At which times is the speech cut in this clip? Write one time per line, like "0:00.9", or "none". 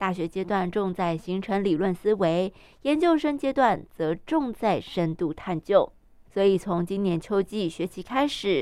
0:06.3